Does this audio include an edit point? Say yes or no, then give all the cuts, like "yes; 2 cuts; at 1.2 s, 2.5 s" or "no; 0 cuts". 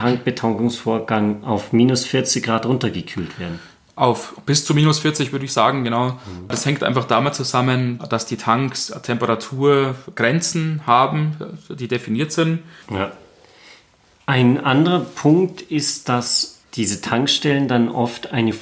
yes; 2 cuts; at 12.8 s, 16.6 s